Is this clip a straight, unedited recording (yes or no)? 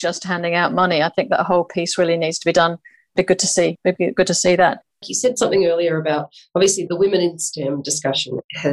no